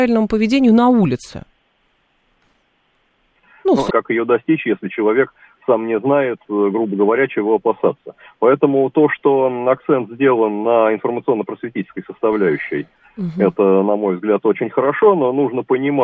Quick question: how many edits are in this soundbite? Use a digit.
1